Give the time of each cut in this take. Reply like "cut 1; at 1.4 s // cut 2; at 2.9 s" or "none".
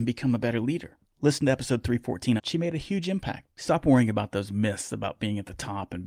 cut 1; at 2.4 s // cut 2; at 3.6 s